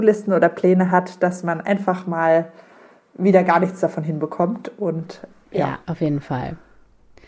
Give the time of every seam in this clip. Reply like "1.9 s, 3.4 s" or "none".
5.8 s